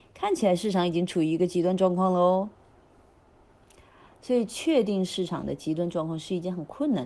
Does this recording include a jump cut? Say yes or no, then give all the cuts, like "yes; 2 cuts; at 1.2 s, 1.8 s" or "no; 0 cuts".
no; 0 cuts